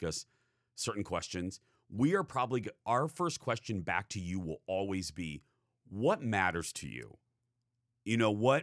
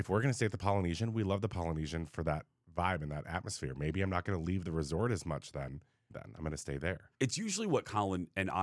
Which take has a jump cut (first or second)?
second